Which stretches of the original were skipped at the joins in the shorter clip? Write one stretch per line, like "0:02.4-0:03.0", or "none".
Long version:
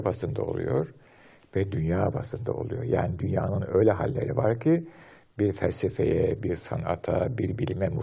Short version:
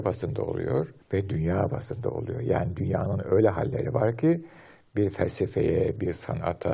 0:01.0-0:01.4